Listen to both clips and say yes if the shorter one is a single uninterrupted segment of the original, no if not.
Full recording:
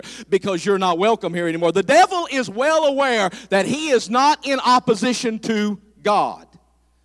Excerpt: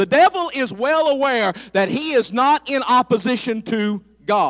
yes